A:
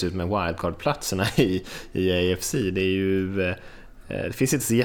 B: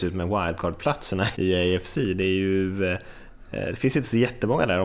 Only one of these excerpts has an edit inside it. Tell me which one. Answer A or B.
B